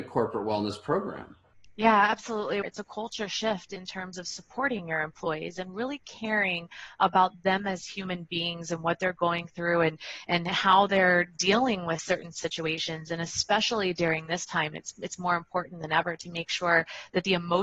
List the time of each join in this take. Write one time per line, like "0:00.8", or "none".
0:02.6